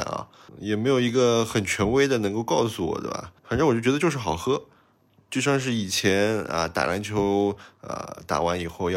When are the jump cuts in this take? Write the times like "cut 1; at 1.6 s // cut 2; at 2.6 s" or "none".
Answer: cut 1; at 3.4 s